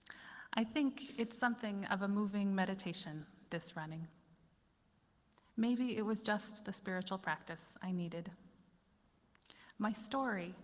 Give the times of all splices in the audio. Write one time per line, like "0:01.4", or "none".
0:09.7